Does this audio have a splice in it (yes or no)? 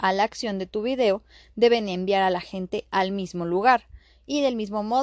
no